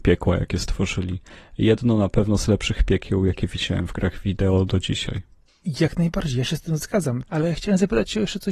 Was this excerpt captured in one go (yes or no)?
no